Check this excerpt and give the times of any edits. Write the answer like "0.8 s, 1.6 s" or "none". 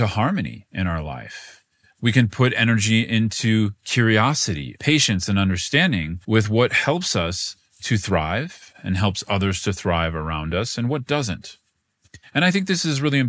4.8 s, 6.2 s